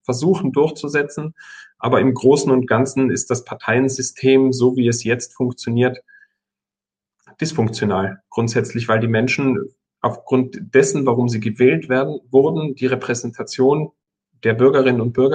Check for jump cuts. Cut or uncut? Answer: uncut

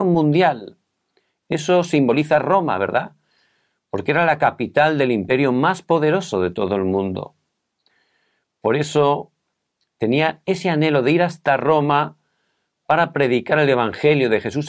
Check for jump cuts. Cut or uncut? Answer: uncut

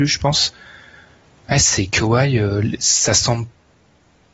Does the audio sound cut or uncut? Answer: uncut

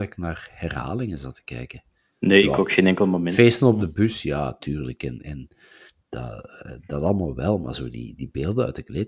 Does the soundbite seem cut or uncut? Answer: uncut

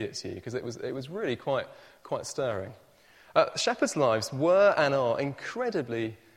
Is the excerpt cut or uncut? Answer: uncut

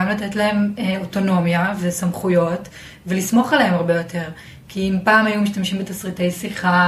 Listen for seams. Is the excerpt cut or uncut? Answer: uncut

